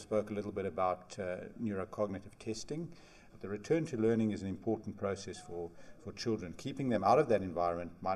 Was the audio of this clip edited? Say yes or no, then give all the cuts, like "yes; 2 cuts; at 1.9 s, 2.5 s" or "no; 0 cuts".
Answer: yes; 1 cut; at 3.3 s